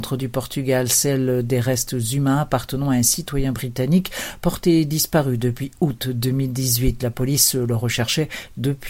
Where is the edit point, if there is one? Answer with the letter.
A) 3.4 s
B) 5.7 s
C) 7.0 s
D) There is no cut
D